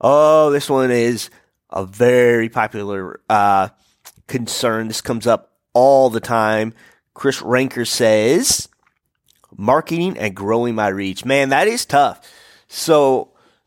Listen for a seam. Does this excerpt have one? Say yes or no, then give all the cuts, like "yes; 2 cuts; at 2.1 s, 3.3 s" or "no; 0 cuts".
no; 0 cuts